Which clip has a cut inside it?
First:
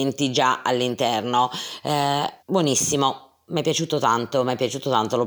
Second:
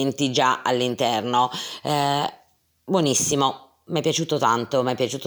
first; 1 cut; at 2.4 s

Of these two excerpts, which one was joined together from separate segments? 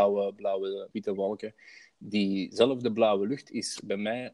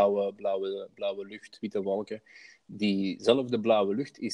first; 1 cut; at 0.9 s

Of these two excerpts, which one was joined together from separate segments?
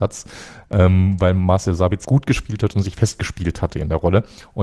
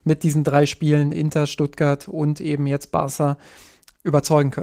first; 1 cut; at 2.0 s

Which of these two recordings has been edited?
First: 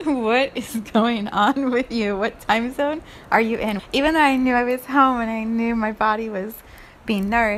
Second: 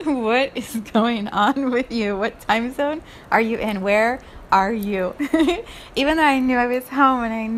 first; 1 cut; at 3.8 s

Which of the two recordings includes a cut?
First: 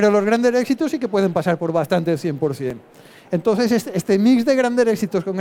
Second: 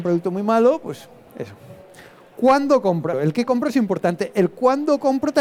second; 1 cut; at 3.1 s

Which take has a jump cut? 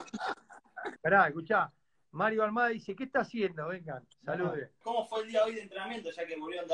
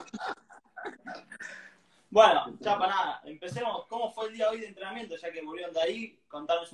first; 2 cuts; at 1.0 s, 4.8 s

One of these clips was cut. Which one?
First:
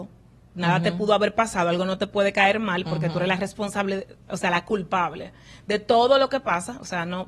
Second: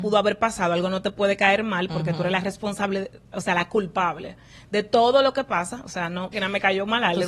second; 1 cut; at 6.3 s

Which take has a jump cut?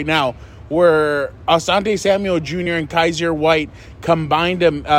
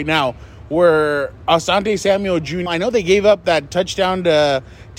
second; 1 cut; at 2.7 s

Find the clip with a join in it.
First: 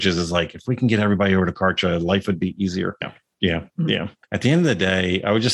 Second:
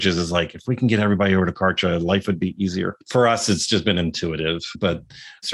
first; 2 cuts; at 3.0 s, 4.2 s

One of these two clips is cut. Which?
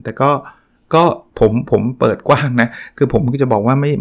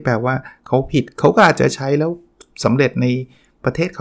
first; 1 cut; at 1.3 s

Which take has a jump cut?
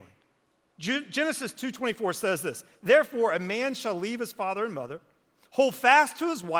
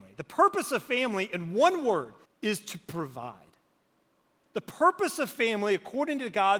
second; 1 cut; at 2.3 s

